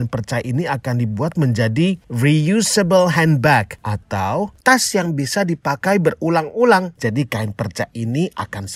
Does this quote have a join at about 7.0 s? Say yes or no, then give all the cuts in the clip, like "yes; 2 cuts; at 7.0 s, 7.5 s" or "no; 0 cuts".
yes; 1 cut; at 7.0 s